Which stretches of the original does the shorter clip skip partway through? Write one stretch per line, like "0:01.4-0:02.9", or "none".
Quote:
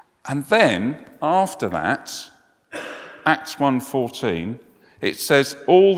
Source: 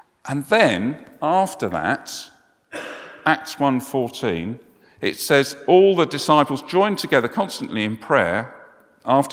none